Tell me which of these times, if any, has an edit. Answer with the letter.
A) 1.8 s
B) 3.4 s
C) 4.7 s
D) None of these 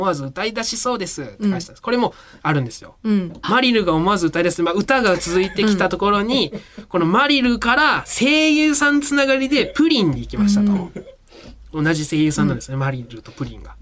B